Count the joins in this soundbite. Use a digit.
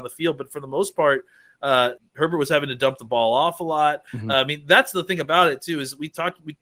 2